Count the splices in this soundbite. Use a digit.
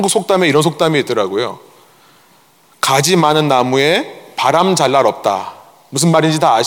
0